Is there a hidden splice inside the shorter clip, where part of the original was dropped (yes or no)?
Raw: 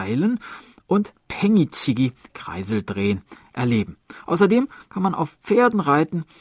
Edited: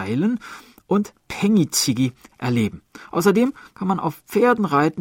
yes